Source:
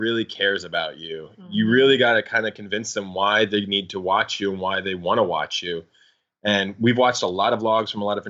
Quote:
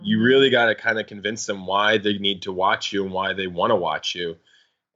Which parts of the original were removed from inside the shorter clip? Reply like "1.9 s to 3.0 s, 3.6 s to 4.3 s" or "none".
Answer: none

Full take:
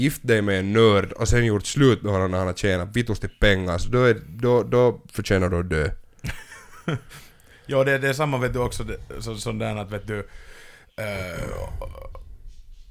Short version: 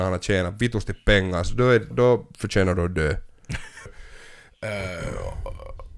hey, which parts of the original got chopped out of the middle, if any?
4.3 s to 4.7 s, 6.6 s to 10.2 s

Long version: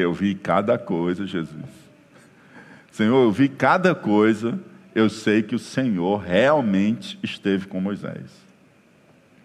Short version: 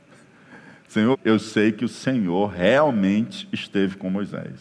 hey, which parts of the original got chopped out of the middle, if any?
3.2 s to 4.8 s

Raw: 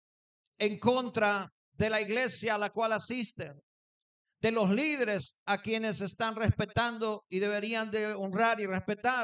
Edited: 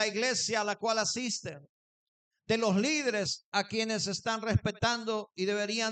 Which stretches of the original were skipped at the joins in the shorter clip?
none

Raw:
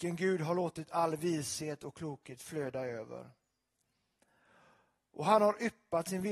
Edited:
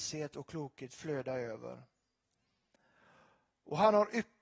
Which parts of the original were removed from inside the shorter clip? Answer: none

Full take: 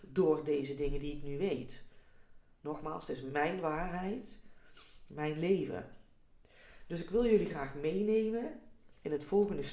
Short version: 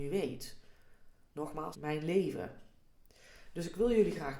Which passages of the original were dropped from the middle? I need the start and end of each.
3.0 s to 5.1 s

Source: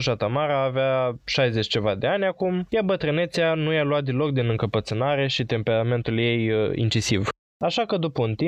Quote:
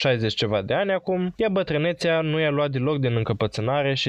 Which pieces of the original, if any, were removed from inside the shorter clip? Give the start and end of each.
none

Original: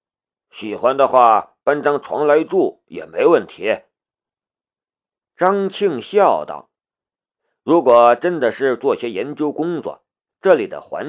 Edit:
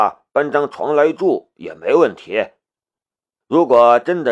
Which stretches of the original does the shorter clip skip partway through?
4.7 s to 7.6 s

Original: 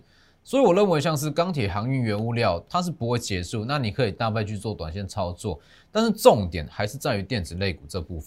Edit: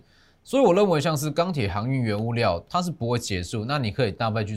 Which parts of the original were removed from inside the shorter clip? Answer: none

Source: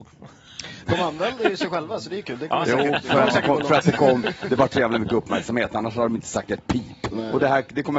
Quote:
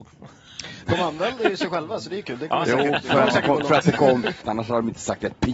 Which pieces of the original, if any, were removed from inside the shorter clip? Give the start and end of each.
4.4 s to 5.7 s

